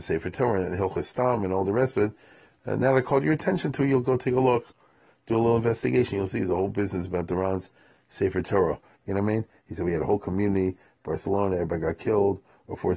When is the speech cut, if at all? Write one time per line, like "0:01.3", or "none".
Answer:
0:09.0